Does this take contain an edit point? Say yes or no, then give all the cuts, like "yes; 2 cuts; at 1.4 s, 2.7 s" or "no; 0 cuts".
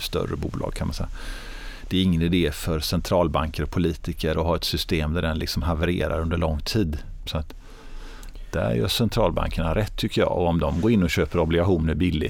yes; 1 cut; at 7.3 s